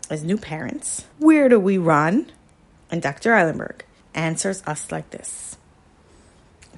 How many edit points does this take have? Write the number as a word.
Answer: three